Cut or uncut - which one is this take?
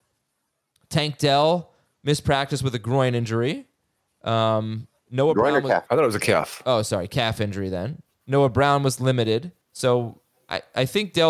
cut